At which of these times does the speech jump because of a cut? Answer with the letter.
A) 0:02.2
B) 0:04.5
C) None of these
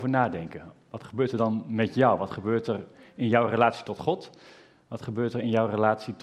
C